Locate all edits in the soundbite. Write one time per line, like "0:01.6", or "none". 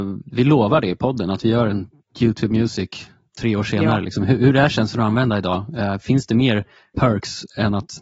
0:06.9